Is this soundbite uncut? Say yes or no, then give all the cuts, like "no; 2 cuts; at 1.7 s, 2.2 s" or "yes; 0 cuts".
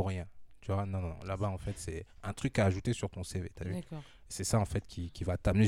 yes; 0 cuts